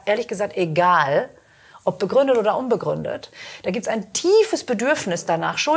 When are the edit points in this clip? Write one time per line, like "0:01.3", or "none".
none